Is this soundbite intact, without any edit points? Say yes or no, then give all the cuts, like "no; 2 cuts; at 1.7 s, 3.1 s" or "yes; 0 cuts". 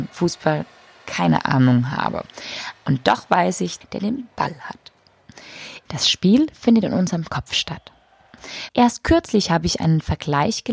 no; 3 cuts; at 3.8 s, 5.9 s, 8.7 s